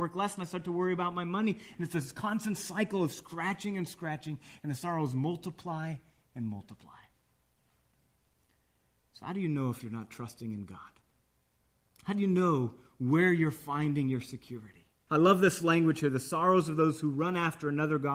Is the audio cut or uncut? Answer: cut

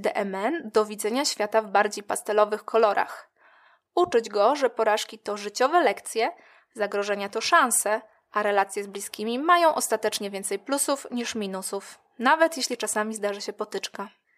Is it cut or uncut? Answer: uncut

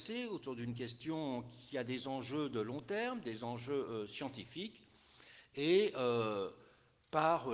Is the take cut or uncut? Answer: uncut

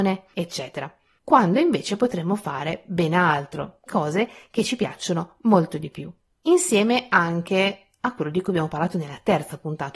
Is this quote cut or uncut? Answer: cut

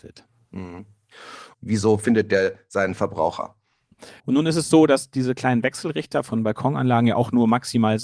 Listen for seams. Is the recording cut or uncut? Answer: cut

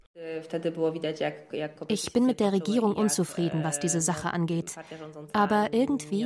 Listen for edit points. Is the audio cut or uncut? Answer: uncut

